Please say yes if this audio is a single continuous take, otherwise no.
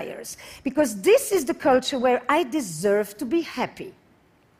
yes